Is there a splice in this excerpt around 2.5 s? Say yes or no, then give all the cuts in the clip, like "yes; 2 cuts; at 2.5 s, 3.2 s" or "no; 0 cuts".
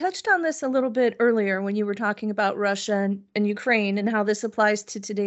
no; 0 cuts